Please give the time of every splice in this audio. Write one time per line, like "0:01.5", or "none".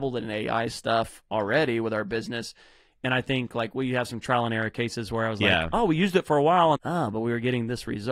0:06.7